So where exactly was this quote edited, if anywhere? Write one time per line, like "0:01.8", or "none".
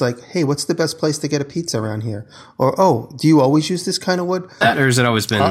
0:04.6

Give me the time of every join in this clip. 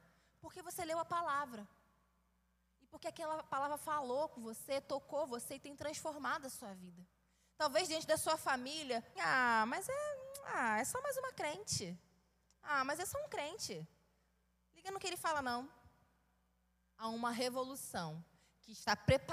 0:09.2

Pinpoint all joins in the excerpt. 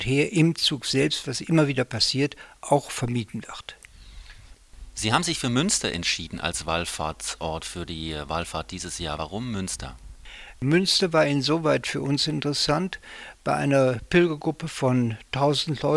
none

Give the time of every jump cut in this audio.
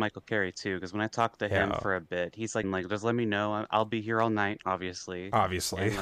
0:02.6

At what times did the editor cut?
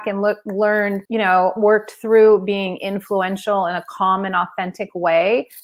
0:01.0

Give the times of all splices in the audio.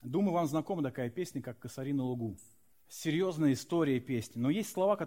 0:02.7

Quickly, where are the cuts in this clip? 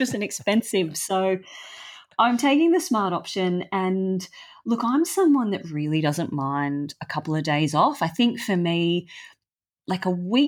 none

